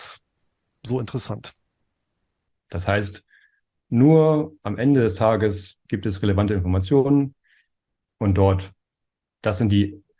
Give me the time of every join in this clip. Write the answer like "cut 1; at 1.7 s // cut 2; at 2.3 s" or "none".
cut 1; at 2.5 s // cut 2; at 5.9 s